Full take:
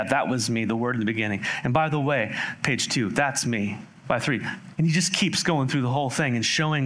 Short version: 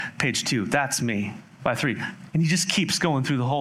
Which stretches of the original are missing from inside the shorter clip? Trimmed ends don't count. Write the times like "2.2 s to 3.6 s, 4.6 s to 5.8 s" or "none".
none